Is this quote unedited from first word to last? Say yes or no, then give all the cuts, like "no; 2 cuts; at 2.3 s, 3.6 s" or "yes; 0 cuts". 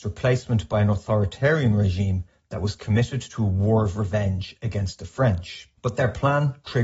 no; 1 cut; at 5.8 s